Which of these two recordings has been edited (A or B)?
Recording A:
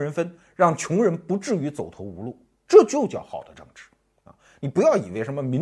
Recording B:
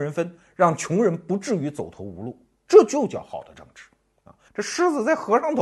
B